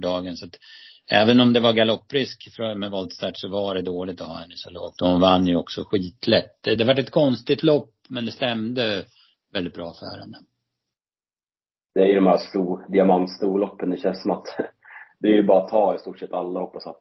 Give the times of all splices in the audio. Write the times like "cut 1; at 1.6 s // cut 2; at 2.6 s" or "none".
none